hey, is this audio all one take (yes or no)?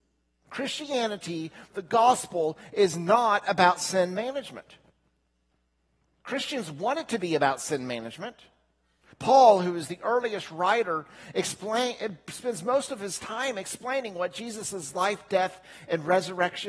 no